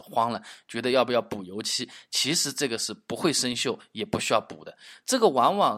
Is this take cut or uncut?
uncut